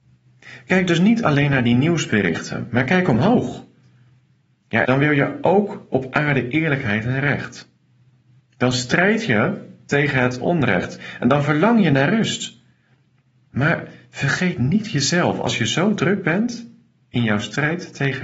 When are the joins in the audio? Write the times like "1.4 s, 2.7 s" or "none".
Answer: 4.8 s